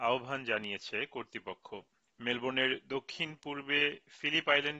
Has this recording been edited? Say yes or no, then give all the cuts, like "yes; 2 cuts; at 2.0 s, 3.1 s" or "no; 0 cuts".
no; 0 cuts